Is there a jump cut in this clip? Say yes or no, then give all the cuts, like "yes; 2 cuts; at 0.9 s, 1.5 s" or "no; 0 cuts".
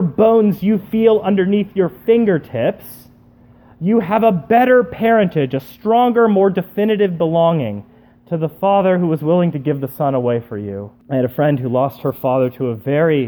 yes; 1 cut; at 11.0 s